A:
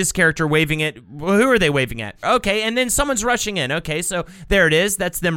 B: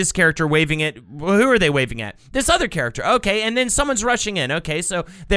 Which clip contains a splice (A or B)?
A